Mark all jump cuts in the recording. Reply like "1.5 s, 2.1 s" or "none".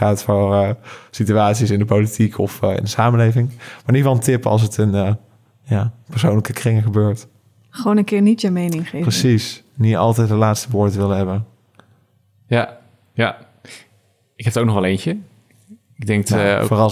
none